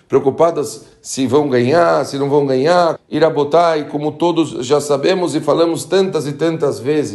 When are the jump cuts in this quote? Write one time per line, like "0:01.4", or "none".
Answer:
0:03.0